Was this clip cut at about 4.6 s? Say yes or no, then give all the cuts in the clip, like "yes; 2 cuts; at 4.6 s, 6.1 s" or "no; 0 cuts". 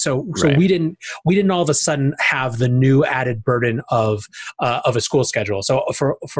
no; 0 cuts